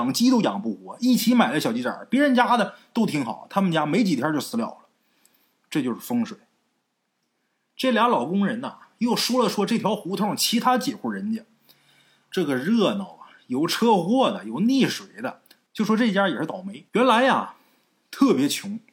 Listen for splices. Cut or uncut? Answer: cut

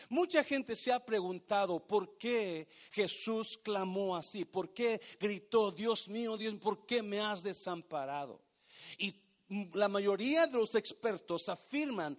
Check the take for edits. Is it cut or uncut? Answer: uncut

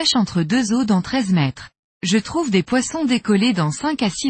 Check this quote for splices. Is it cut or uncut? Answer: cut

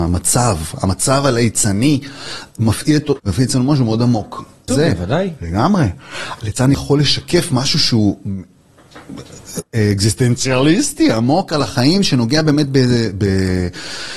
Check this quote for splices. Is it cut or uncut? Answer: cut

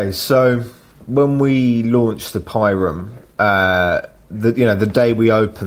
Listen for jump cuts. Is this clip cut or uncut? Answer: uncut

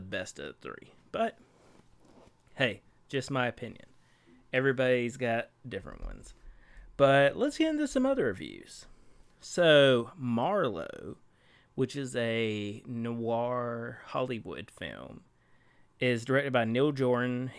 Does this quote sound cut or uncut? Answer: uncut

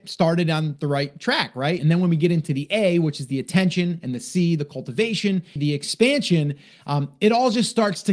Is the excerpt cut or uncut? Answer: cut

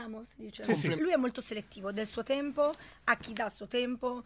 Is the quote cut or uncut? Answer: cut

